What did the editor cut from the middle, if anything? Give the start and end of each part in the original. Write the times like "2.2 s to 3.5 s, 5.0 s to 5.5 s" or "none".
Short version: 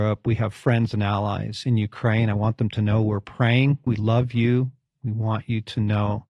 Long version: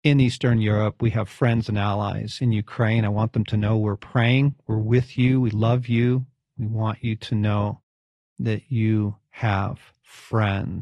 4.6 s to 5.4 s